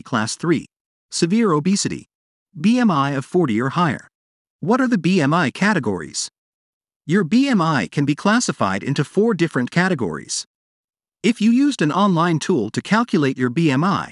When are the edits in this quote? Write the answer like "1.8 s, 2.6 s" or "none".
none